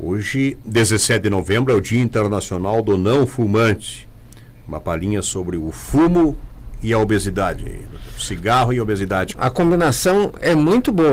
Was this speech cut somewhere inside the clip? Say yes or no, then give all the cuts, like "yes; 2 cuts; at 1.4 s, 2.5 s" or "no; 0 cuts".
yes; 1 cut; at 9.3 s